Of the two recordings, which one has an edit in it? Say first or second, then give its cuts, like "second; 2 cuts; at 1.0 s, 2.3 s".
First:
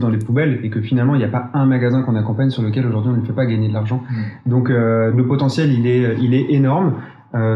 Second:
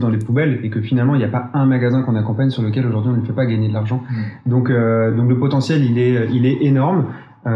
first; 1 cut; at 5.1 s